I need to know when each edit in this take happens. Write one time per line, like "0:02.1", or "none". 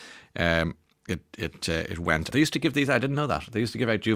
0:02.3